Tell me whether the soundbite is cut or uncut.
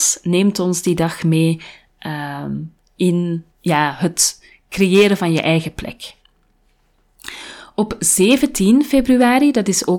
cut